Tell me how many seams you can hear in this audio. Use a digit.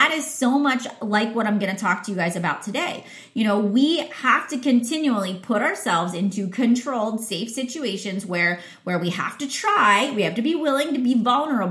0